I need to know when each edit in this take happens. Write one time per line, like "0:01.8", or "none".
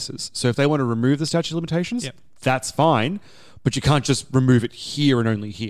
none